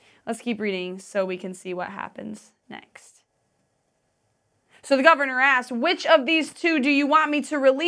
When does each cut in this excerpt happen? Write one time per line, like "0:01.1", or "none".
none